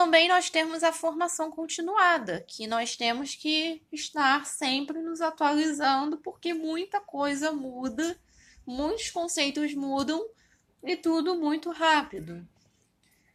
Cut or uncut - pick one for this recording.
uncut